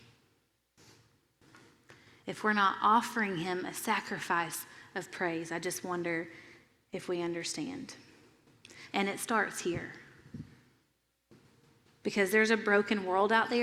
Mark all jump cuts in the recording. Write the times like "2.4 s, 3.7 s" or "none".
8.9 s, 12.0 s

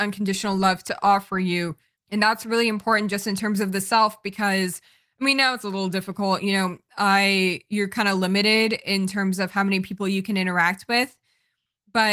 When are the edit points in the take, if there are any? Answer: 2.0 s

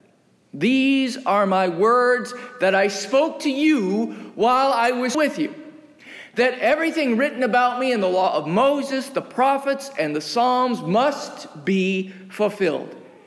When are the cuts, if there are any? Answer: 5.1 s

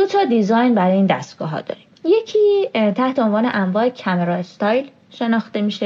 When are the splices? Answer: 1.9 s

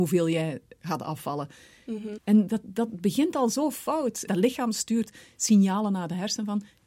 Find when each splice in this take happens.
2.2 s, 4.3 s

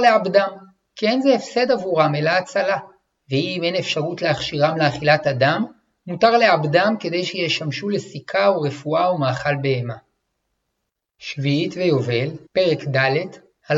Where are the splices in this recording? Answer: 12.5 s

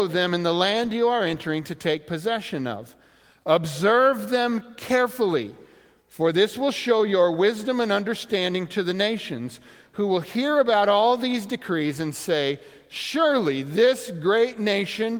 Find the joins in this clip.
none

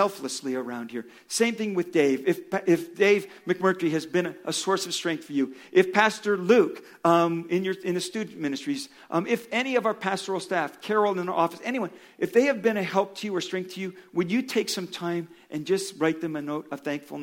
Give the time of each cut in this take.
none

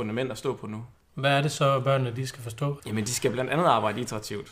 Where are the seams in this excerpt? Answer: 0.9 s, 2.8 s

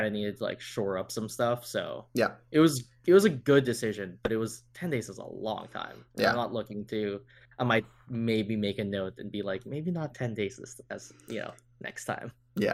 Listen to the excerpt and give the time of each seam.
none

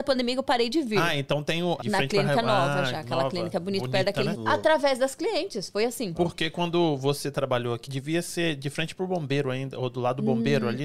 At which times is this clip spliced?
1.8 s, 4.3 s, 7.9 s

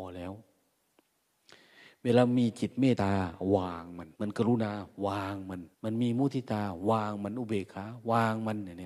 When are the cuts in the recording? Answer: 2.9 s, 4.1 s, 5.7 s

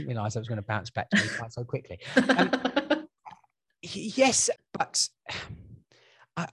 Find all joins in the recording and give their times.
4.6 s

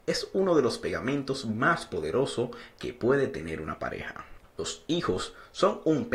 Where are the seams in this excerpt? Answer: none

